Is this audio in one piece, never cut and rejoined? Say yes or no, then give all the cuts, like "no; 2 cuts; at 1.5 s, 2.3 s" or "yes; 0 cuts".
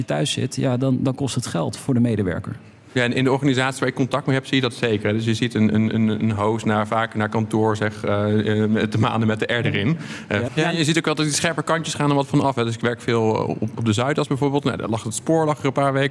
no; 1 cut; at 10.5 s